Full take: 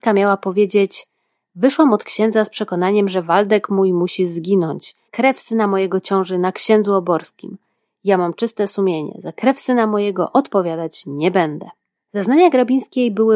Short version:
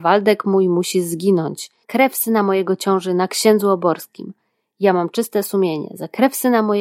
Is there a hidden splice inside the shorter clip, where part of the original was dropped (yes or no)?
no